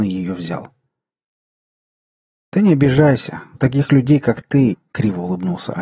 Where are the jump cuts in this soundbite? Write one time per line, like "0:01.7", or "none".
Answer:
0:03.5
0:04.7